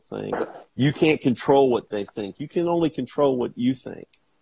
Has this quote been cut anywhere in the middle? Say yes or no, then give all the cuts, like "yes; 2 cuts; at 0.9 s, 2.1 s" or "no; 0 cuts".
no; 0 cuts